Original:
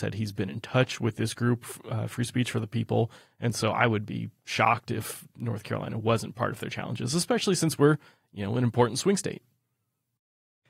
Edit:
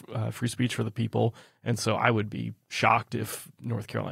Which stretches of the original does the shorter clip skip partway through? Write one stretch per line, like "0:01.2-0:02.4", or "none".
none